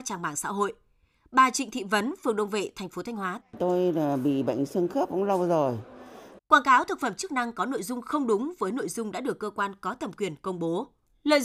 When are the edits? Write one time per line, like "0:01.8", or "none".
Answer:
0:03.4
0:06.4

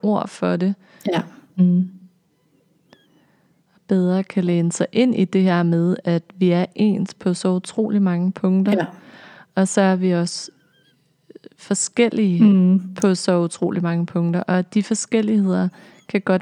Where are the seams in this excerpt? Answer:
0:01.6

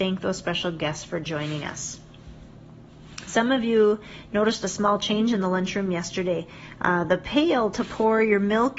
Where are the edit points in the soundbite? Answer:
none

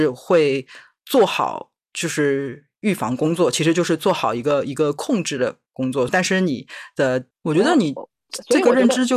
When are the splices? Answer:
0:06.1
0:07.3

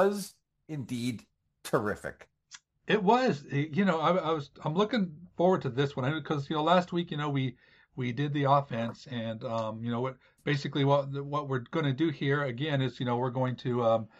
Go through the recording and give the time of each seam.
none

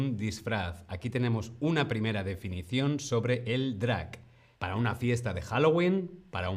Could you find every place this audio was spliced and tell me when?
0:04.6

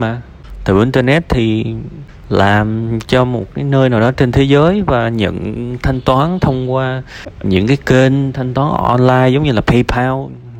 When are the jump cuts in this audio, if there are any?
0:07.4

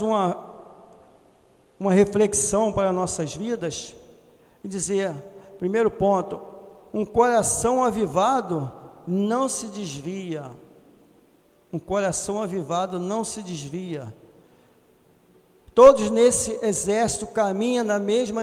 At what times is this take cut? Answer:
none

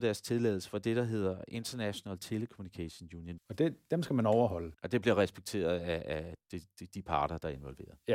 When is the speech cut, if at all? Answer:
0:03.4

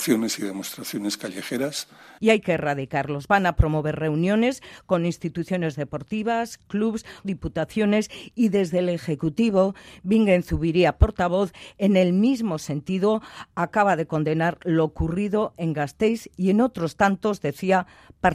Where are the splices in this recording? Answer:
0:02.2
0:07.2

